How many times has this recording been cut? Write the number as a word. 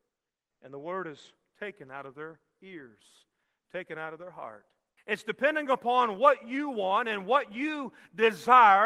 one